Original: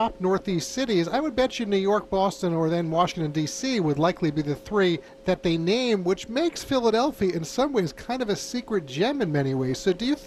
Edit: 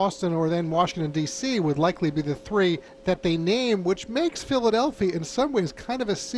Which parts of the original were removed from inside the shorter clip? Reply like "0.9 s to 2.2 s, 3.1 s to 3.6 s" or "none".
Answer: none